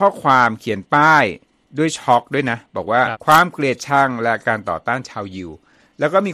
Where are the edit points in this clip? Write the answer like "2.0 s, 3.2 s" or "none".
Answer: 3.1 s